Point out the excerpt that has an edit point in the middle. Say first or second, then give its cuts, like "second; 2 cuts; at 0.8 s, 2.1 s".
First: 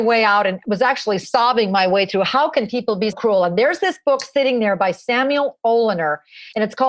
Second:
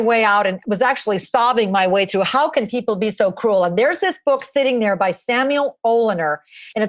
first; 1 cut; at 3.1 s